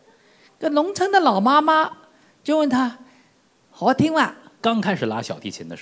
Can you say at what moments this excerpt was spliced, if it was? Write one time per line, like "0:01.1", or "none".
0:04.6